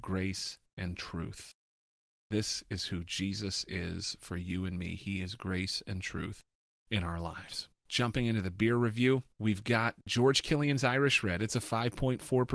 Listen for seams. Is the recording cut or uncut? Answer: uncut